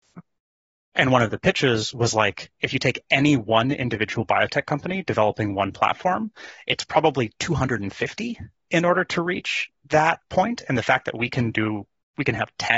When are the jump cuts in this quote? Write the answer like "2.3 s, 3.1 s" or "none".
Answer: none